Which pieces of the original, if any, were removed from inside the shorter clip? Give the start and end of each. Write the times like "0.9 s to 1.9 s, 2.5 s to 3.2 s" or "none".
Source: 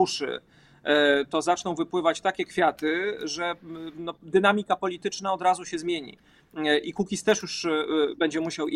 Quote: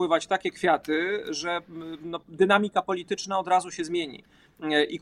none